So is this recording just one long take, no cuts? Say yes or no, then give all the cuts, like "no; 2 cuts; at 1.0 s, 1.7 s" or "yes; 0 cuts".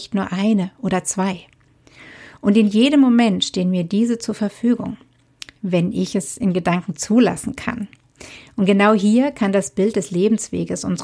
yes; 0 cuts